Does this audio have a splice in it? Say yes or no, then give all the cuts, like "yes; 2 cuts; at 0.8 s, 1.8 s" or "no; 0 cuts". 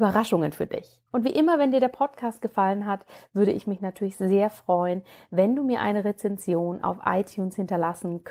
yes; 1 cut; at 1.1 s